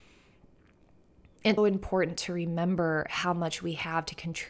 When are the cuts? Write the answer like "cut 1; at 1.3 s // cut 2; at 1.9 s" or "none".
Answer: cut 1; at 1.6 s